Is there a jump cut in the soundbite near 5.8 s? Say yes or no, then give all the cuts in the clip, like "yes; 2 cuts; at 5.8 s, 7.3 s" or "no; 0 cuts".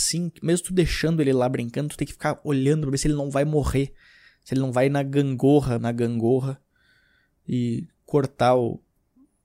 yes; 1 cut; at 5.8 s